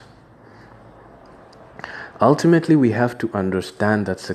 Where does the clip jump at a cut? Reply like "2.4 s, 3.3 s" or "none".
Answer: none